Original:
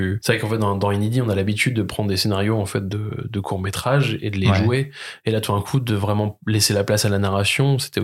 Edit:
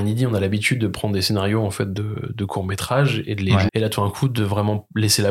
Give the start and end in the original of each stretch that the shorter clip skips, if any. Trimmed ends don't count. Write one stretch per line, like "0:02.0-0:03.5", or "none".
0:04.6-0:05.2